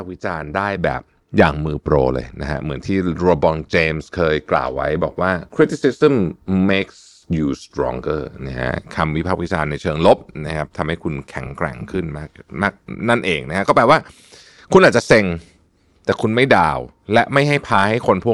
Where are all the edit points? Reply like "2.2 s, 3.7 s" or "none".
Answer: none